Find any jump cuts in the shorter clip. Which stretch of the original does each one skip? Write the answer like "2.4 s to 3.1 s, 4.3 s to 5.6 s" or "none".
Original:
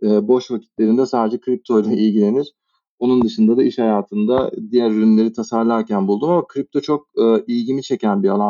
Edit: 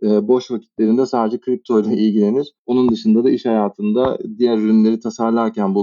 2.6 s to 2.9 s